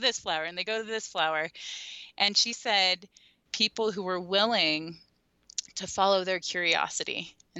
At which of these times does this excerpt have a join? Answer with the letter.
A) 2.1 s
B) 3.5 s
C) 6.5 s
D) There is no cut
B